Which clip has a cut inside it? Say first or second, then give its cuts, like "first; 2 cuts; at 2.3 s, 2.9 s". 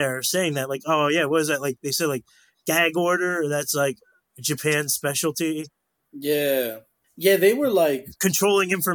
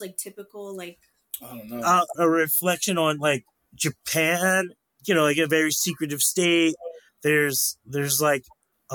second; 2 cuts; at 2.1 s, 7.1 s